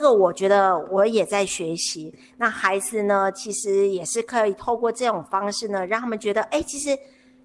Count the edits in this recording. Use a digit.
0